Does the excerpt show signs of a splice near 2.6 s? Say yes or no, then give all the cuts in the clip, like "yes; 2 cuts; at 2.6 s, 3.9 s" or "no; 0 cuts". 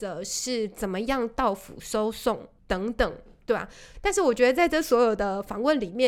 yes; 2 cuts; at 2.6 s, 3.9 s